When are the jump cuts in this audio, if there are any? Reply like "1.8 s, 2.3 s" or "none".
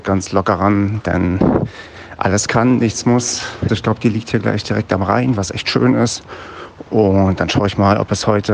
3.7 s

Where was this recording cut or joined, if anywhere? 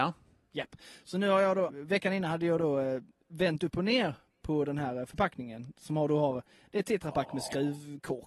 1.7 s

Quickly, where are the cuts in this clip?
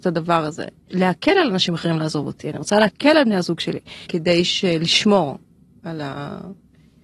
0.9 s, 4.1 s

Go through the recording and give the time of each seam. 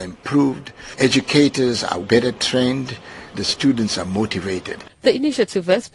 1.0 s, 2.0 s, 3.3 s

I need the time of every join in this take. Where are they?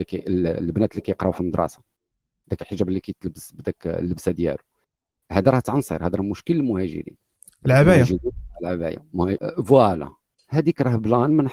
9.4 s

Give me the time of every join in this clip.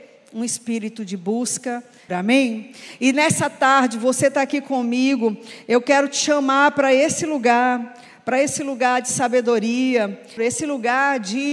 2.1 s, 10.4 s

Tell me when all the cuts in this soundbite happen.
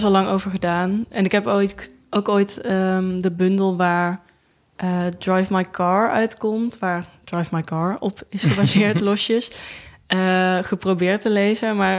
none

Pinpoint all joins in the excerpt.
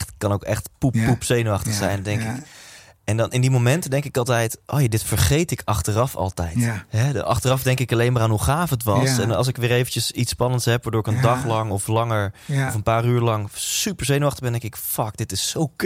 none

